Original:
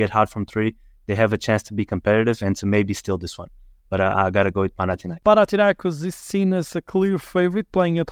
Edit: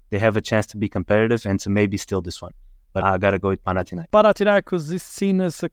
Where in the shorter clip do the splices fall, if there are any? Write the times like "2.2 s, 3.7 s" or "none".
3.0 s